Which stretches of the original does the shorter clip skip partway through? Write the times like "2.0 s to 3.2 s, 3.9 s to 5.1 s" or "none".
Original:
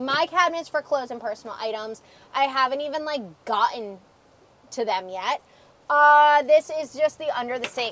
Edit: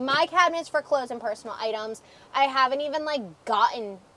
none